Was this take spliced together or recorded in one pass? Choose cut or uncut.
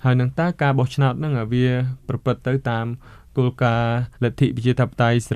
cut